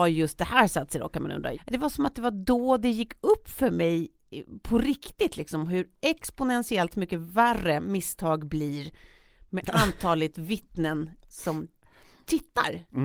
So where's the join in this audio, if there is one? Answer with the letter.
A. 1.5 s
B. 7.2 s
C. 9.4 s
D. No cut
A